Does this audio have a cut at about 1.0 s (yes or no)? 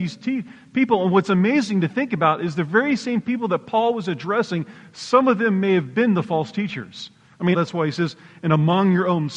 no